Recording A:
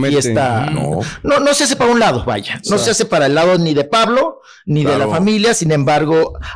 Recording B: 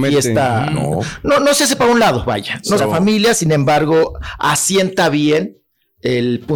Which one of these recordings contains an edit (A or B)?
B